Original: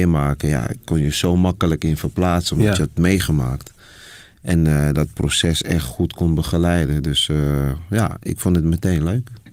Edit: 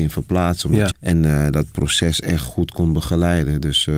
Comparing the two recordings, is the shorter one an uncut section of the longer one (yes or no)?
no